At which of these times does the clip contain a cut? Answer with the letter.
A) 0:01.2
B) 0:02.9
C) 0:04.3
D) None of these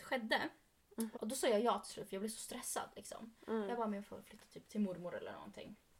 A